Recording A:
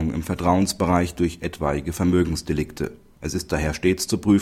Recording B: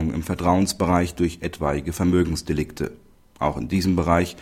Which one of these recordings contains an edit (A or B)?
A